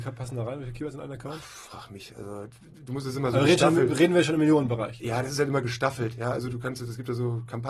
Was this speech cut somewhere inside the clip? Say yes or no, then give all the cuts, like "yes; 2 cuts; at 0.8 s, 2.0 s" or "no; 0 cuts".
no; 0 cuts